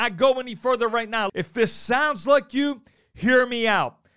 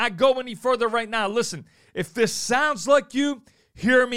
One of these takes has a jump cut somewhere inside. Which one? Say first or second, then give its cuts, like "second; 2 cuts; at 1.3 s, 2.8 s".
first; 1 cut; at 1.3 s